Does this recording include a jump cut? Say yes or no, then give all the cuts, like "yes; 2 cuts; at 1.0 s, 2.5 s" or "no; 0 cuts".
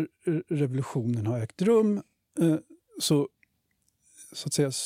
no; 0 cuts